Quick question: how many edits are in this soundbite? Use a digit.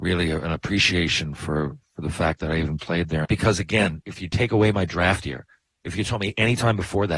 1